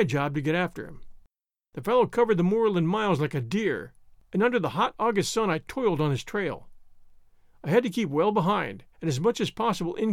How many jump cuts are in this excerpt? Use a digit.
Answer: 2